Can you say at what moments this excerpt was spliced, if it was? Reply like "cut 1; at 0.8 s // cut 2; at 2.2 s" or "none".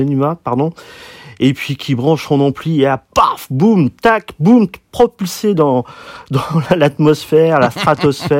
none